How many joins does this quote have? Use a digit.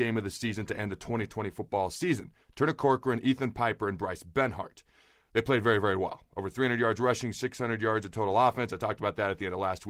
0